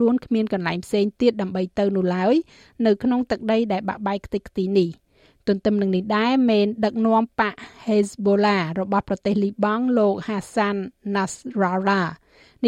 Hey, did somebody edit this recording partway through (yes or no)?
no